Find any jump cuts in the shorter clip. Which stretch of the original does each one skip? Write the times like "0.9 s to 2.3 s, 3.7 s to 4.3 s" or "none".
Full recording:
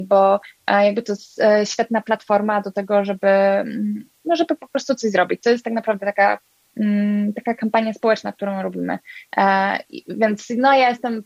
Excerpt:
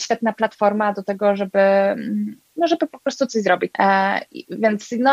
5.4 s to 9.3 s